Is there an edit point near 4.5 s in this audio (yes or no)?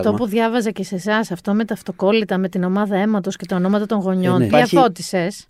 yes